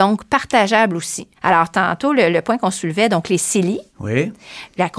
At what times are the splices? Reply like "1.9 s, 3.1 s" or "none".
1.4 s